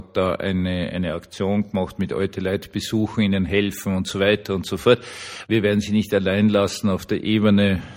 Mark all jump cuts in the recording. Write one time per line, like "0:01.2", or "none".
0:05.5